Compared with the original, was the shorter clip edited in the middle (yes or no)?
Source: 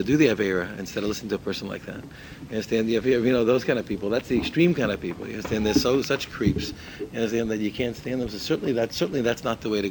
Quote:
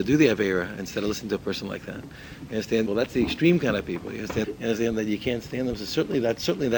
yes